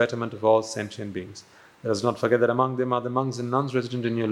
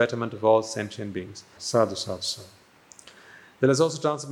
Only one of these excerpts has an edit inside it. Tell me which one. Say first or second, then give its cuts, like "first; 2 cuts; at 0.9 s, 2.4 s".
second; 1 cut; at 1.6 s